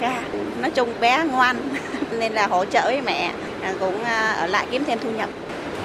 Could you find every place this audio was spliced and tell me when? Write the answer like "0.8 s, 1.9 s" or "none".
none